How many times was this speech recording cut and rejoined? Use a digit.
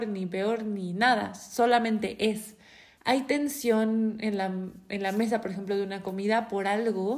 1